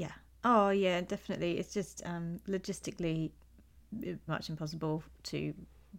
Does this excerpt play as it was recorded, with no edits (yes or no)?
no